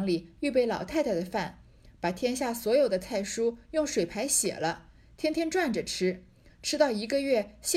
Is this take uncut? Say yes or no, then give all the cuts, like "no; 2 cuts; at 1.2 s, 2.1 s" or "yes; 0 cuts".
yes; 0 cuts